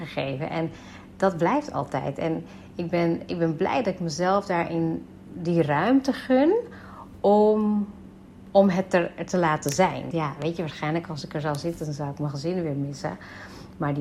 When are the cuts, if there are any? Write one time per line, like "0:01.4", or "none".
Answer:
0:10.1